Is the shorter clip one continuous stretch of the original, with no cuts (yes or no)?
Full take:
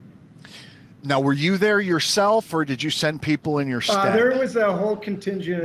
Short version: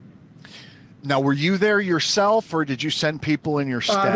yes